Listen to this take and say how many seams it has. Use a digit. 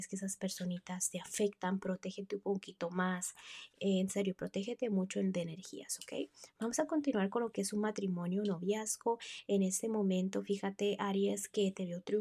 1